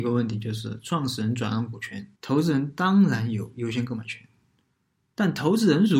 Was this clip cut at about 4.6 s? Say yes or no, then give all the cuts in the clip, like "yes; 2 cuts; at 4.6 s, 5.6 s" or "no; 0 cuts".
no; 1 cut; at 2.1 s